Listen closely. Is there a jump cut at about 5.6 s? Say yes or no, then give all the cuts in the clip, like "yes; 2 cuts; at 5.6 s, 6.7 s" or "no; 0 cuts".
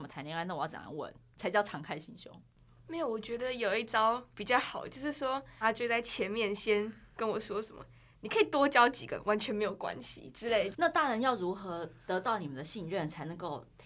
yes; 2 cuts; at 5.6 s, 10.7 s